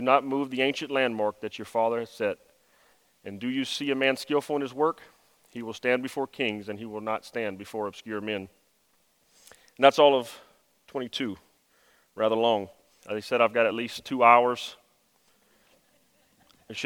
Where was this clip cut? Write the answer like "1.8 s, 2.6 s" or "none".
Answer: 13.0 s